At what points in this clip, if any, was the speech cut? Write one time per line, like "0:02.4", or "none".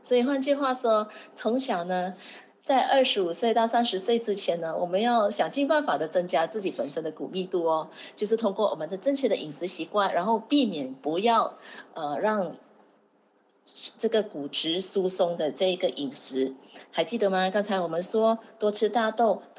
none

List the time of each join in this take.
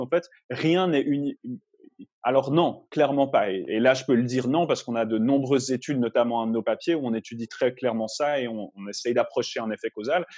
0:02.1
0:08.7

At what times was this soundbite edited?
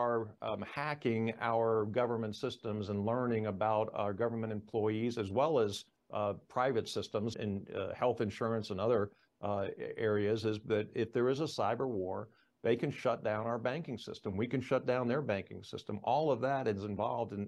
0:07.3

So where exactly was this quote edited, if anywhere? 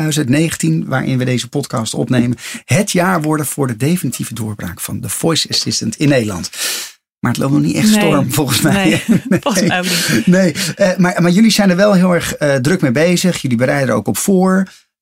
none

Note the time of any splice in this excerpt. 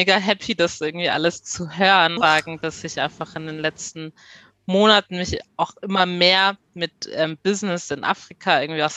0:02.2

